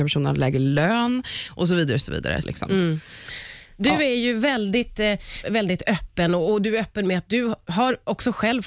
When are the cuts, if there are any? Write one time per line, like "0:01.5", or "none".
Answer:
0:02.4
0:05.4